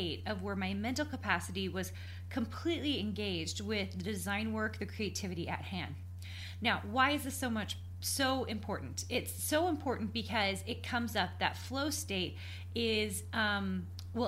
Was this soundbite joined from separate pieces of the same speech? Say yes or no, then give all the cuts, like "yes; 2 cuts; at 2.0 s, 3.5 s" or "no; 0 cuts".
no; 0 cuts